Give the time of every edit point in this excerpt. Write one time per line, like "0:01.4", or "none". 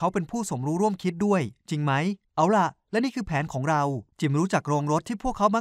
0:02.2
0:04.1